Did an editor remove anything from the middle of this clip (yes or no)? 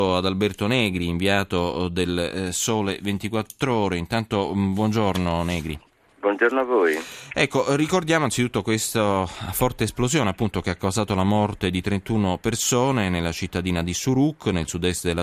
no